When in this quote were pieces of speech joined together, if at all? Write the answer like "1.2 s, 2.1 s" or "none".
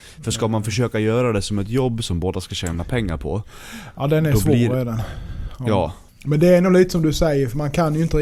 6.1 s